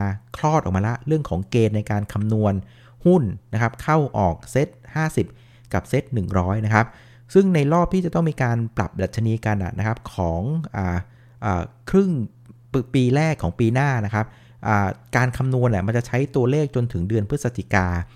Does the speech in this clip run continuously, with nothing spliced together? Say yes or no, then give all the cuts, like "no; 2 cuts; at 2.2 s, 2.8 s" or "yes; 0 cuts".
yes; 0 cuts